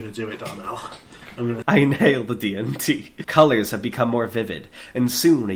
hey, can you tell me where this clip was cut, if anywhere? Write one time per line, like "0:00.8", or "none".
0:01.6
0:03.2